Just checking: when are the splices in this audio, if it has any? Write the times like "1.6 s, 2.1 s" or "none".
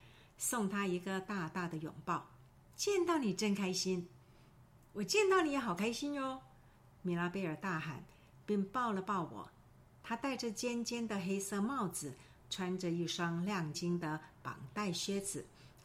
13.7 s